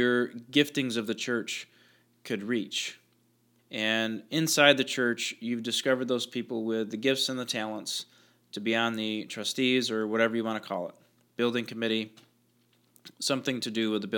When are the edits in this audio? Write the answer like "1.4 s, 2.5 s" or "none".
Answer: 3.6 s